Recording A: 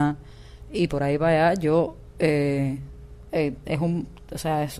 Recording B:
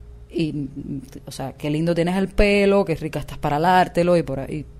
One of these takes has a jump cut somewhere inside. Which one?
A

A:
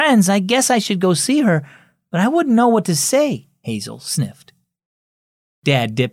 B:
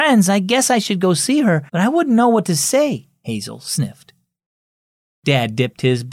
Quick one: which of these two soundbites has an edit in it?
B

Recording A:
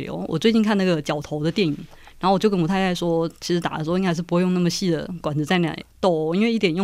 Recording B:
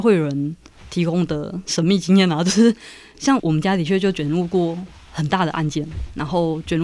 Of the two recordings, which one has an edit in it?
B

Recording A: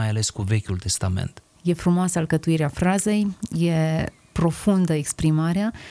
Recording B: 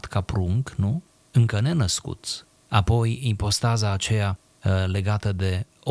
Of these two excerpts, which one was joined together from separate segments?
A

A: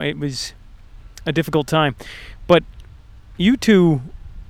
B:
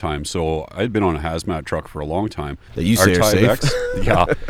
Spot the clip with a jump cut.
B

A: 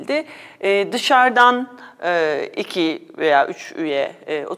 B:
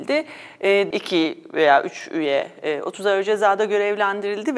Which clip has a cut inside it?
B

